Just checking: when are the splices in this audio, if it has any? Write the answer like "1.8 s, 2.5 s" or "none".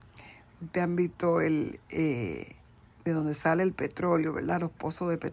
none